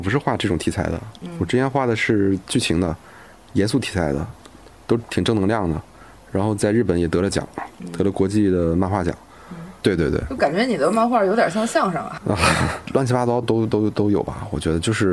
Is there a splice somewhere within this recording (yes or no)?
yes